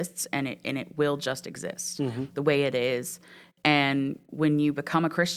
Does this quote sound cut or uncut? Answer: cut